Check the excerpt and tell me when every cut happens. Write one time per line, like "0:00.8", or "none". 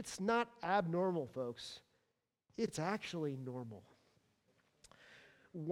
none